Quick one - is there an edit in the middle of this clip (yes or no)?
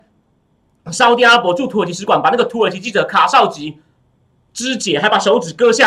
no